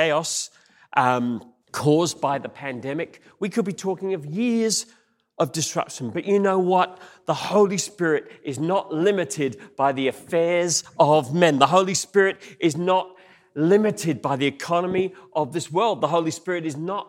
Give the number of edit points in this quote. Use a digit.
1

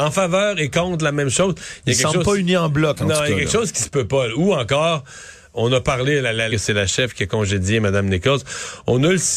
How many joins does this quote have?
1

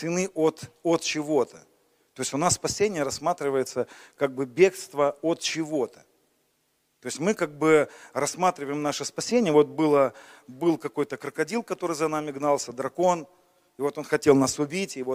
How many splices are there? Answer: 0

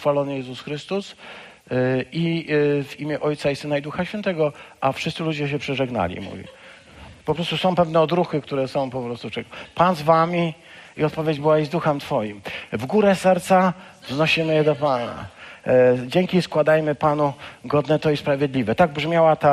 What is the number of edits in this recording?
1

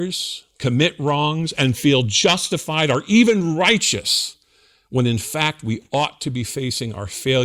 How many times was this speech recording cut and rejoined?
0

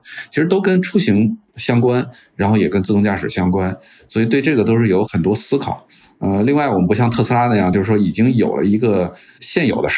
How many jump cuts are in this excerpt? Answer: 0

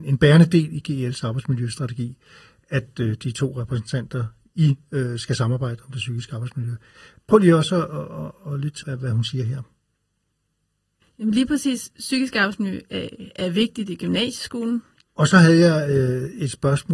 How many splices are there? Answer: 2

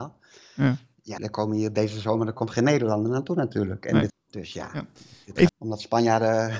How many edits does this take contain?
3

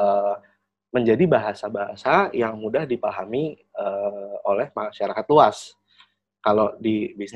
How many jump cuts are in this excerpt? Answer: 0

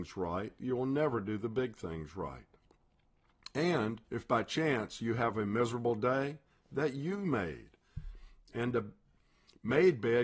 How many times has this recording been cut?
2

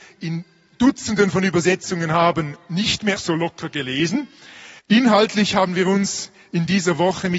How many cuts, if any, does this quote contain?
2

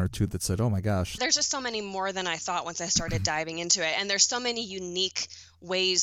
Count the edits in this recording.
1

